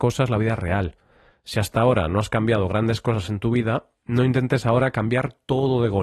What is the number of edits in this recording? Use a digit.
1